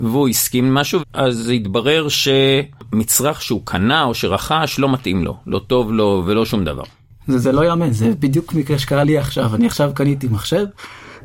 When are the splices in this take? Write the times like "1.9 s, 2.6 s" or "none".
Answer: 1.0 s